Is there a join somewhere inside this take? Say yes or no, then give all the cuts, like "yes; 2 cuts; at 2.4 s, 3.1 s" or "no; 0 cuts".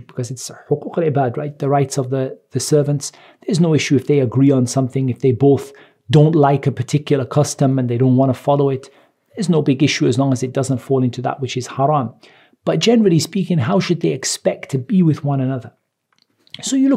no; 0 cuts